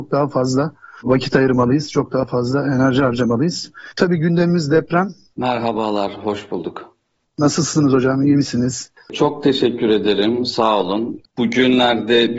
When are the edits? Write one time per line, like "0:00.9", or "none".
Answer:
0:05.3